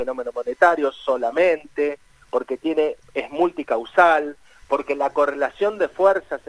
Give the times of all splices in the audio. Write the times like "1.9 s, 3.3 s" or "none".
4.6 s

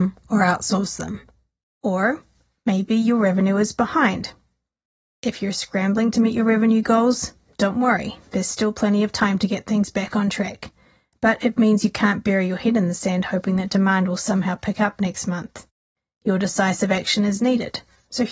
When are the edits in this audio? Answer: none

